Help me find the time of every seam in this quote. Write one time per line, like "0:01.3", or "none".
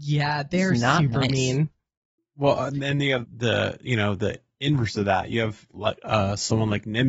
0:02.2
0:03.2